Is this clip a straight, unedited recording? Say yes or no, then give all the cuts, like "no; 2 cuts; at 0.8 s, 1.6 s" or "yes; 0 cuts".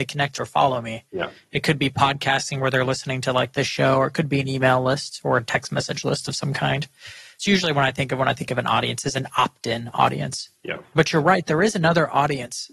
yes; 0 cuts